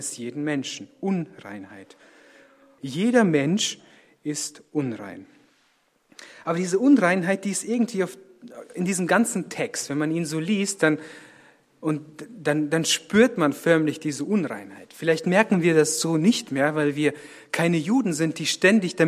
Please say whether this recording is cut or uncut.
cut